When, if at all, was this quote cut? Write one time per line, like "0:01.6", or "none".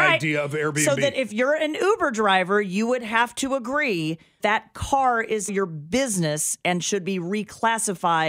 0:04.4
0:05.5